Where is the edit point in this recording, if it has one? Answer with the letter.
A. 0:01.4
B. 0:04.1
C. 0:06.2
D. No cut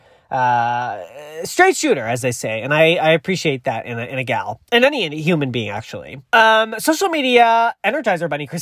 C